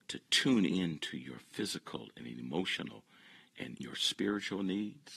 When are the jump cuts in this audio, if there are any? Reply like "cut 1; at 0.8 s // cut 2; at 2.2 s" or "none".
cut 1; at 3.8 s